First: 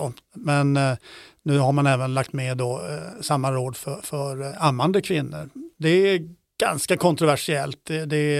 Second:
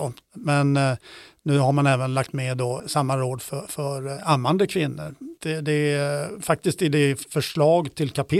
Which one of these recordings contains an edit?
second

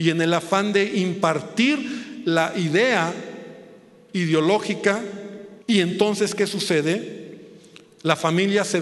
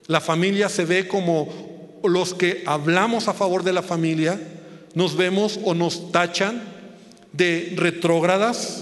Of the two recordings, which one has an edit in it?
first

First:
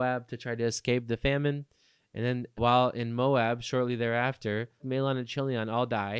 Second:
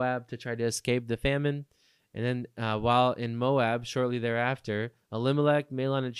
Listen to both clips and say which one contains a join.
first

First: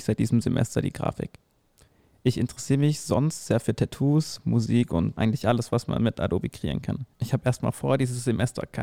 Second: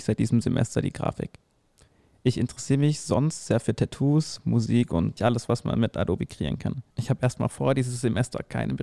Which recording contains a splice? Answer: second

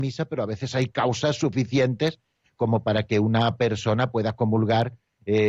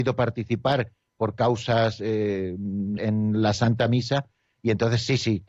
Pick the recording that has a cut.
second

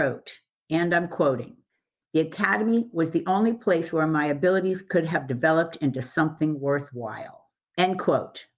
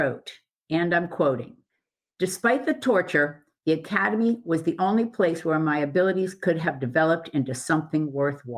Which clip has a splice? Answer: first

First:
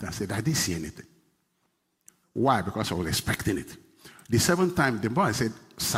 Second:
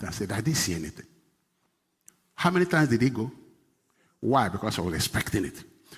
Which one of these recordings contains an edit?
first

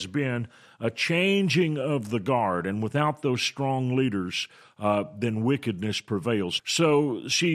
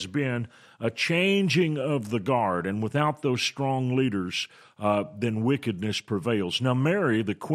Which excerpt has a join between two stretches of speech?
first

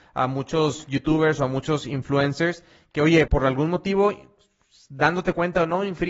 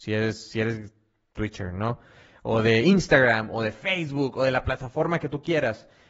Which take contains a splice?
first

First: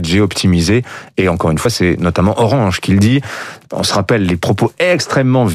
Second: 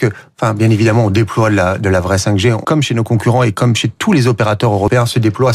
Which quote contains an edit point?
second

